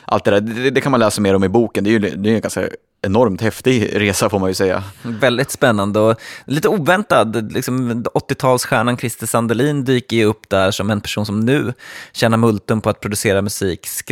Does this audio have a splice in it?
no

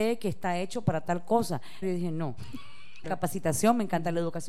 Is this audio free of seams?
no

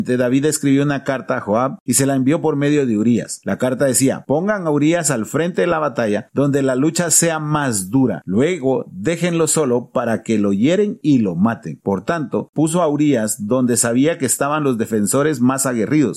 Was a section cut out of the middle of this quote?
yes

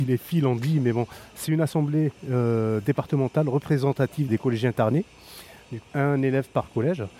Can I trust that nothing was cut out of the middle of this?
no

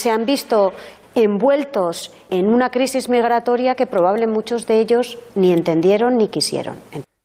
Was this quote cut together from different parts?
yes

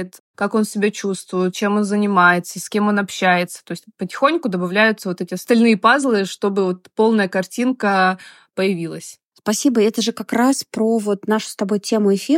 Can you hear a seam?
no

